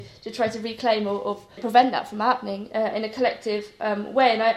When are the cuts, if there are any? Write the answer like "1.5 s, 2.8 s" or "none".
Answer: 1.6 s